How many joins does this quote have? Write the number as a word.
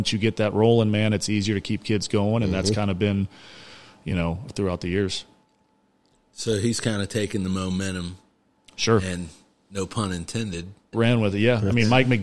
two